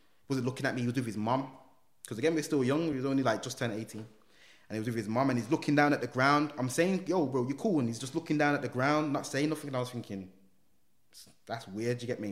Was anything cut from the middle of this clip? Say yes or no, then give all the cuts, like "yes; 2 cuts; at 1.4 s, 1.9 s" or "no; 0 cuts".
no; 0 cuts